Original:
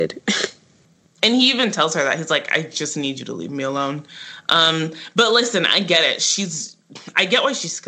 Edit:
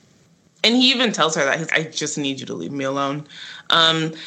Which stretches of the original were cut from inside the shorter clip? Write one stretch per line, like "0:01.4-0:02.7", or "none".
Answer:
0:02.3-0:02.5